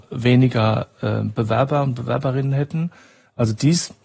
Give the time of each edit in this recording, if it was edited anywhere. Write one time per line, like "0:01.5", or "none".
none